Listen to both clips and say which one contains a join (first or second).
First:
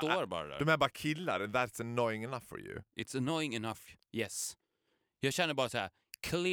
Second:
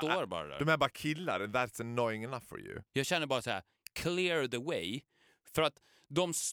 second